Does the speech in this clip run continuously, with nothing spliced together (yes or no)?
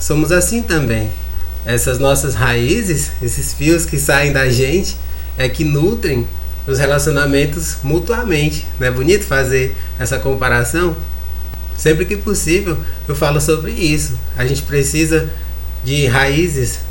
yes